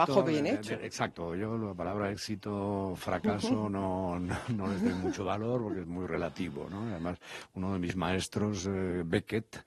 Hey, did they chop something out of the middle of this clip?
no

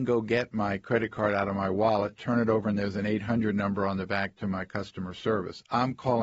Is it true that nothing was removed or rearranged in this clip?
yes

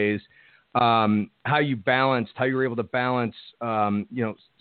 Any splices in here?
no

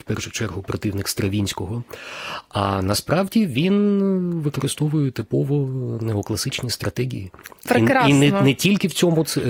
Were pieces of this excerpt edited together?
no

